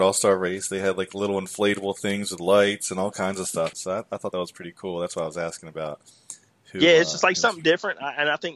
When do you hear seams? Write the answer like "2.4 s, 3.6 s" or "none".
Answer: 3.7 s